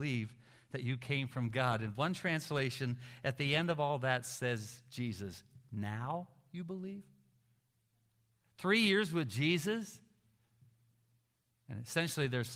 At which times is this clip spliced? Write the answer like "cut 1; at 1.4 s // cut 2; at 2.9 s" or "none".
none